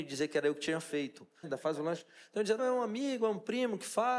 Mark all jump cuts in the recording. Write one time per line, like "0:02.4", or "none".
0:01.4
0:02.6